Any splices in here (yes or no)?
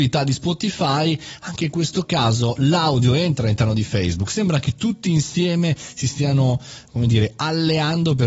no